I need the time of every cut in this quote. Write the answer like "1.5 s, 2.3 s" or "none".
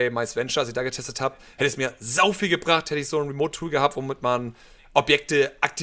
none